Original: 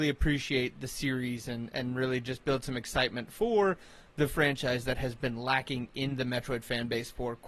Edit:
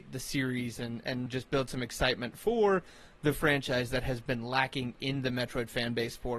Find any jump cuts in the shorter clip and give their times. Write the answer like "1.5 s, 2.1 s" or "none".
1.3 s

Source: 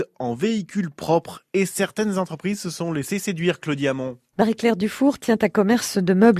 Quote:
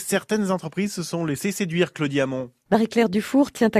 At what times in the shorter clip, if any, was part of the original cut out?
none

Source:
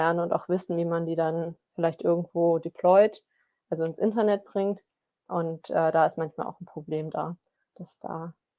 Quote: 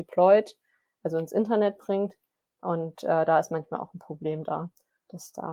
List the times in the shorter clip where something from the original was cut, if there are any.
none

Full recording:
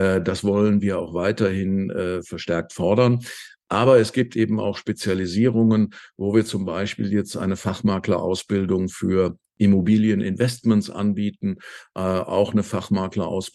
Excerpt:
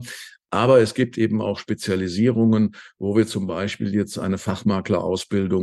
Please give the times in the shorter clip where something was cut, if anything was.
none

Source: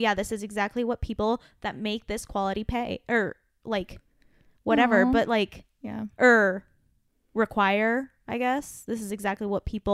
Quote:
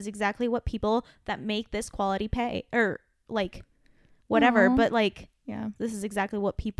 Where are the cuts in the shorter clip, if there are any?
5.8 s

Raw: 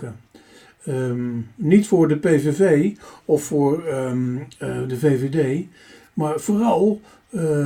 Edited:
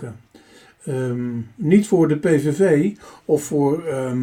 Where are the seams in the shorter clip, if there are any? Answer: none

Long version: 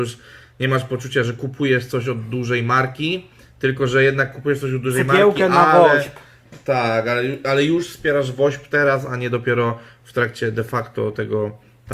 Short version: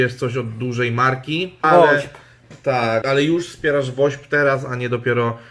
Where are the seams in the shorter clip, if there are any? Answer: 1.6 s, 3.0 s

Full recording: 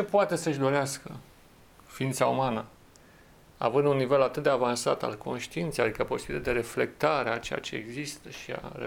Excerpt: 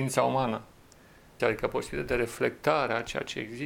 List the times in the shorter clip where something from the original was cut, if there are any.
1.4 s

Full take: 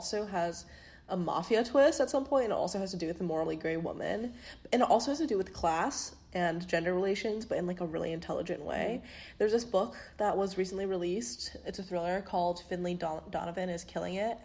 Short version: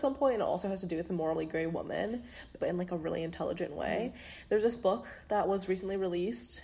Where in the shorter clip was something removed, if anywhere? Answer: 2.6 s

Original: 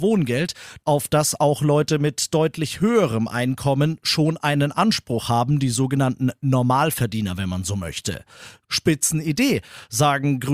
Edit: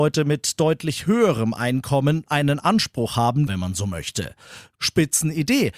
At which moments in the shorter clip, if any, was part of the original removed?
2.3 s, 3.5 s

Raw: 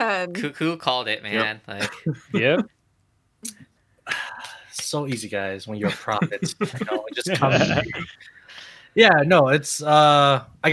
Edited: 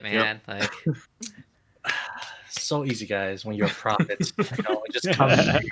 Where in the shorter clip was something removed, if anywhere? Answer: 1.0 s

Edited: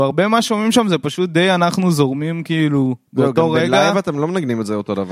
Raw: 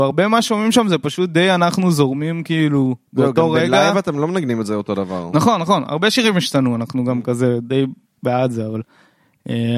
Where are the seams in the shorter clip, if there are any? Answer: none

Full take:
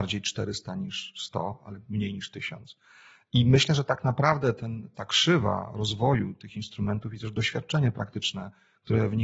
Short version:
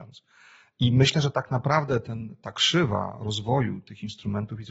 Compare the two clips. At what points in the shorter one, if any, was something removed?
none

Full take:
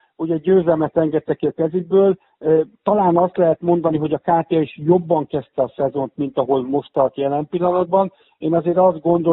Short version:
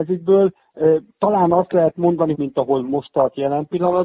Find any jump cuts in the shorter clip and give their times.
2.3 s

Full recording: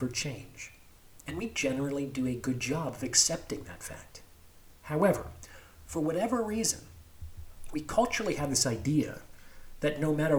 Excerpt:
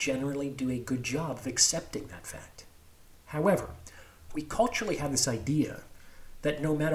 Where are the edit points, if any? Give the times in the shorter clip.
4.3 s

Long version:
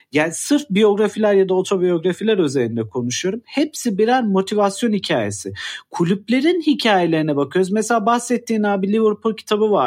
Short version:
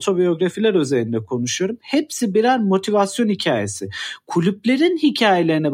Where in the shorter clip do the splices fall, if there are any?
none

